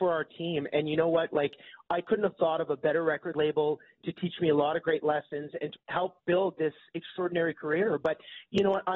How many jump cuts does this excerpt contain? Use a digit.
2